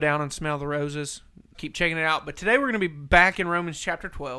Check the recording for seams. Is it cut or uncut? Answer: cut